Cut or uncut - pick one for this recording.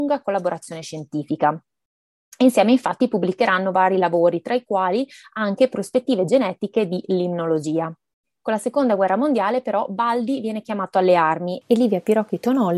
uncut